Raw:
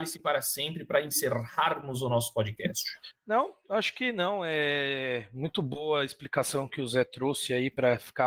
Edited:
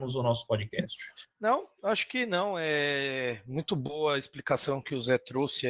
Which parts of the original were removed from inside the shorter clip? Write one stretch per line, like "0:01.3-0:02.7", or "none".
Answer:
none